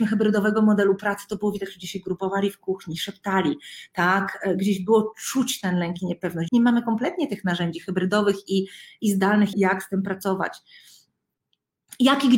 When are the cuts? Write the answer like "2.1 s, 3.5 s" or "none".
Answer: 6.5 s, 9.5 s